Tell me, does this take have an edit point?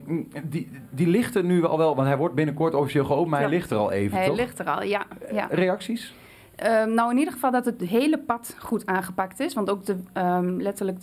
no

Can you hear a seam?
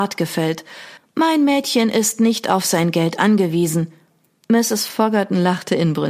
yes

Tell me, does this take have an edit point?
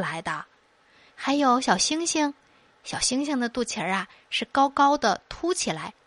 yes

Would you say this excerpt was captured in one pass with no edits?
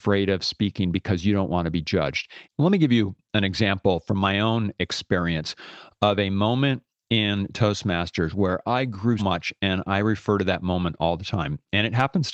no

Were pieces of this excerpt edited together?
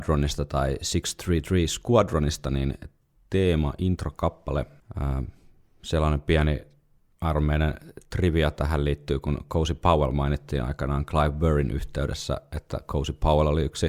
no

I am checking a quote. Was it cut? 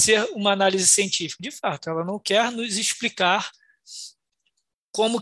no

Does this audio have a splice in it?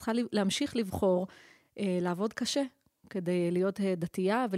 no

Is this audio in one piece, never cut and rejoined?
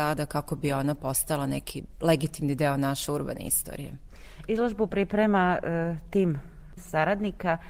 yes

